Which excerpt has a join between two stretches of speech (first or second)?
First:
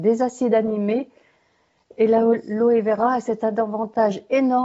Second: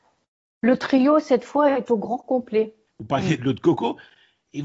second